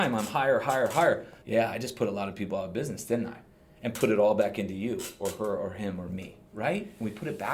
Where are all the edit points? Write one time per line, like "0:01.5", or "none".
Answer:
0:01.4